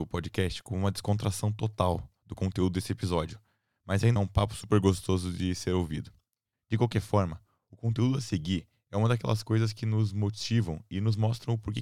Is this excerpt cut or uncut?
cut